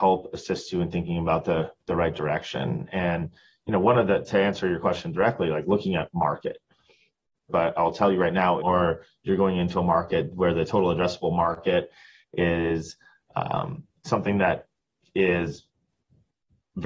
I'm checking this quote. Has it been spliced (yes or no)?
yes